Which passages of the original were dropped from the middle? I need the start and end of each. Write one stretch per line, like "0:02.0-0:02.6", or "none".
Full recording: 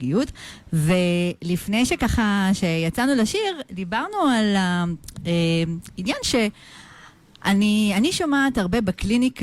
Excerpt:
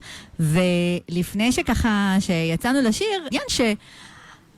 0:03.6-0:06.0